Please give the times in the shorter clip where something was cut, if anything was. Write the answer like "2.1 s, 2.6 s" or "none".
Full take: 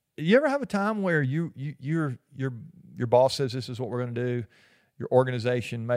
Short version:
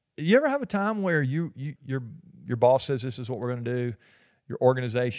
1.8 s